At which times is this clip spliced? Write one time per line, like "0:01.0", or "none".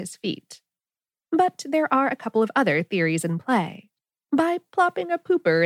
0:01.2
0:04.2